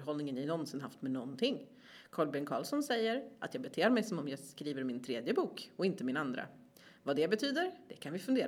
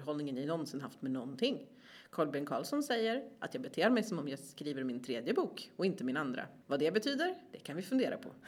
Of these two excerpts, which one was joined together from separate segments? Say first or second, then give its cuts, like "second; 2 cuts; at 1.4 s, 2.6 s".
second; 1 cut; at 6.6 s